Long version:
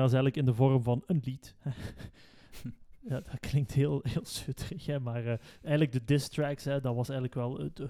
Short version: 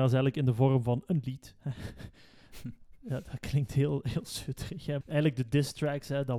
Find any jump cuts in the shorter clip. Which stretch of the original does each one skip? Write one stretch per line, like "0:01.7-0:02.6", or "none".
0:05.0-0:05.6